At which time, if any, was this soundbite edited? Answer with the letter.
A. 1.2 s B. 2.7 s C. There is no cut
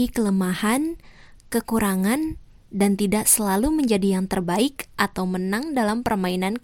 C